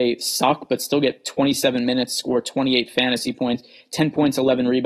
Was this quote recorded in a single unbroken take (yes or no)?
yes